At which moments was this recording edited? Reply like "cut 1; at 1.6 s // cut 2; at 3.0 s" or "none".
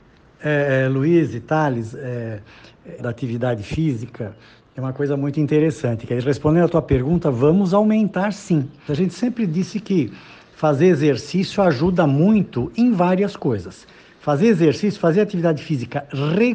cut 1; at 3.0 s // cut 2; at 8.9 s